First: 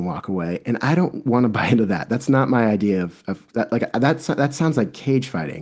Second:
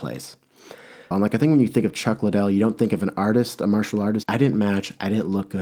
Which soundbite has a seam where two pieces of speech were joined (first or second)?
second